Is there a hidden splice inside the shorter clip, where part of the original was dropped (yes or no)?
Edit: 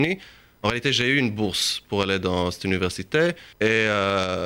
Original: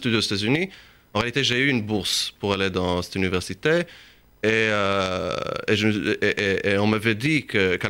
yes